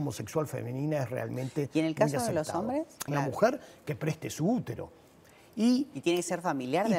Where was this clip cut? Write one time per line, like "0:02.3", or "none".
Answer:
0:03.1